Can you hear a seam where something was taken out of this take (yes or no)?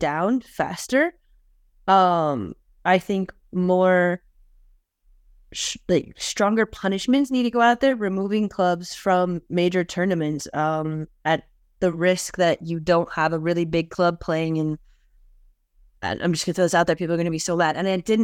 no